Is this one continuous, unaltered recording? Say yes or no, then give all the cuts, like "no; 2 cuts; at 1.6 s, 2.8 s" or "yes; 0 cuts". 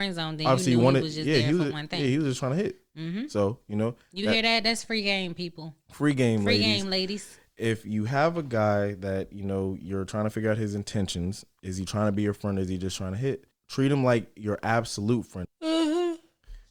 no; 2 cuts; at 13.5 s, 15.4 s